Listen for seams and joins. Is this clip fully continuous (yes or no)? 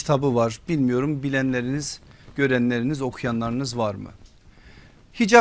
yes